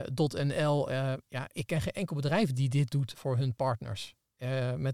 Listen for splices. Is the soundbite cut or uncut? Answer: cut